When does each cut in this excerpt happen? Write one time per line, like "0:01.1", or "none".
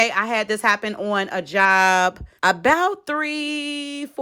0:02.4